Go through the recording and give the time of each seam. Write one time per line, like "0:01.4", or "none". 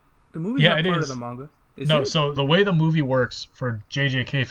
0:02.4